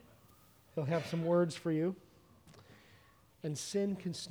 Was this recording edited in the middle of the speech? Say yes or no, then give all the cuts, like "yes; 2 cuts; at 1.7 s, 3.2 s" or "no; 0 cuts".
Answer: yes; 1 cut; at 3.3 s